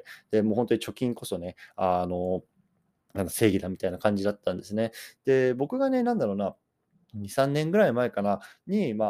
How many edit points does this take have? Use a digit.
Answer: 1